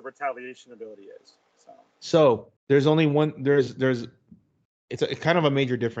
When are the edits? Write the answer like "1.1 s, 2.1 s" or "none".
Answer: 2.6 s